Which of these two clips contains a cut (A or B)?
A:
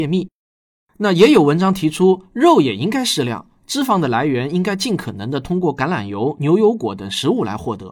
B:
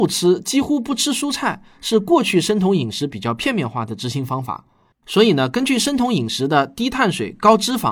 B